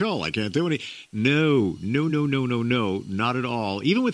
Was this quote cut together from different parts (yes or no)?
no